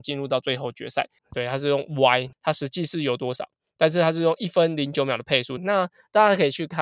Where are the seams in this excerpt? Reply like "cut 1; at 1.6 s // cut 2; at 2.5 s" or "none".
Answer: cut 1; at 1.2 s // cut 2; at 2.3 s // cut 3; at 5.6 s